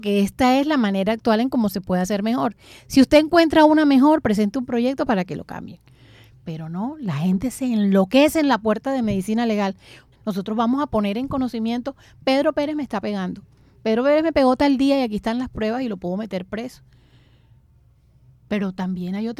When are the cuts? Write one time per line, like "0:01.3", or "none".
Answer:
0:06.3
0:10.1